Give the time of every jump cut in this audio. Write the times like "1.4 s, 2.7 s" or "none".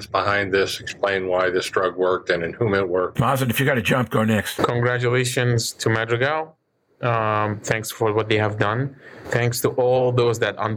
9.2 s